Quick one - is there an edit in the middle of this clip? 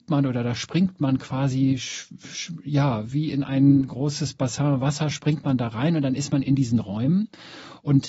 no; 0 cuts

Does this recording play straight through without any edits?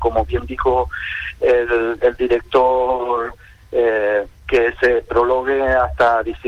yes; 0 cuts

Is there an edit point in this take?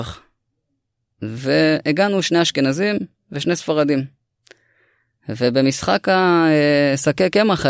no; 0 cuts

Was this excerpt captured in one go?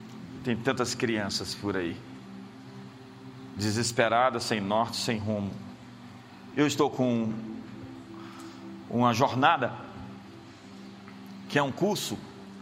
no; 1 cut; at 6.5 s

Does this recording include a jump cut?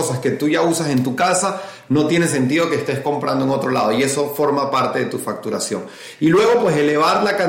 no; 0 cuts

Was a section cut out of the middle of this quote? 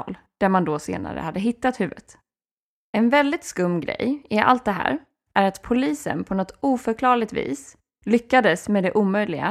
no; 0 cuts

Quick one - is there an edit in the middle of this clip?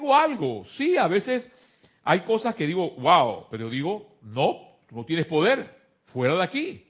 no; 0 cuts

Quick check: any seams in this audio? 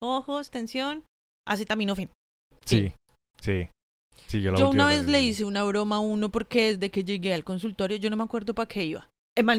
no; 0 cuts

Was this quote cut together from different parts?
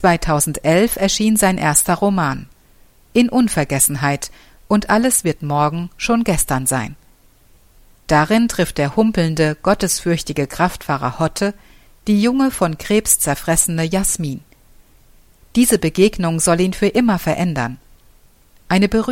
no; 0 cuts

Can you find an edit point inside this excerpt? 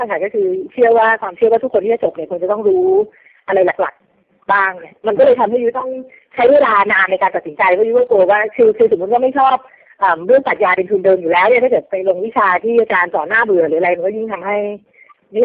no; 0 cuts

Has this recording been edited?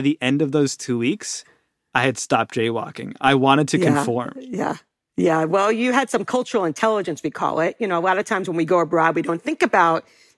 no; 0 cuts

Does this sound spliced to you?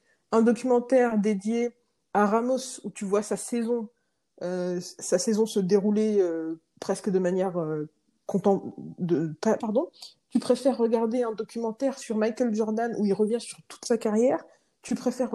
yes; 1 cut; at 9.6 s

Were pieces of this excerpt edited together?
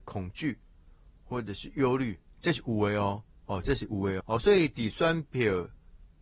yes; 1 cut; at 4.2 s

